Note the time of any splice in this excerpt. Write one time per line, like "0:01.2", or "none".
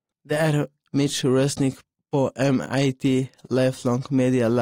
0:01.9